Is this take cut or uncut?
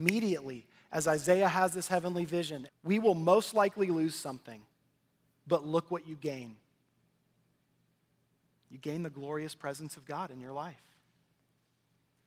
cut